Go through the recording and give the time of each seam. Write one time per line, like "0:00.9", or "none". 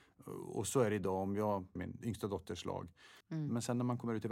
0:01.8
0:03.2